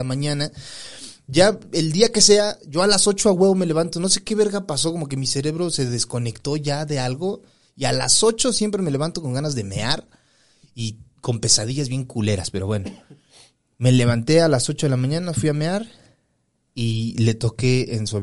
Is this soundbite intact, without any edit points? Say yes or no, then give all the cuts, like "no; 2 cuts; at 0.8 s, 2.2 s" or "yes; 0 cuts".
yes; 0 cuts